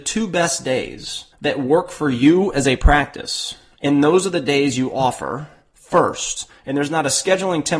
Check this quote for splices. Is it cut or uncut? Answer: cut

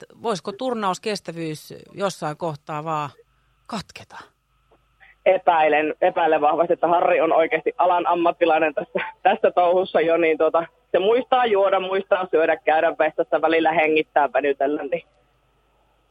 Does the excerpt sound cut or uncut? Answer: uncut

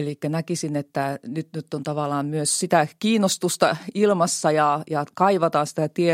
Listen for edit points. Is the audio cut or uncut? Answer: uncut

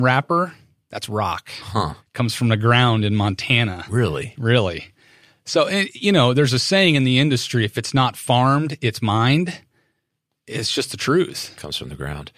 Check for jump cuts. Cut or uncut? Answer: uncut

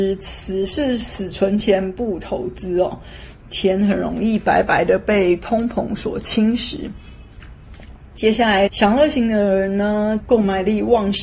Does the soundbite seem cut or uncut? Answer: cut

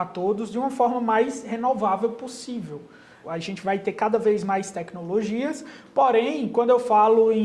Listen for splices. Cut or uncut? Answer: cut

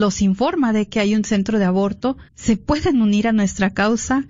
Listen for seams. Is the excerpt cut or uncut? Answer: cut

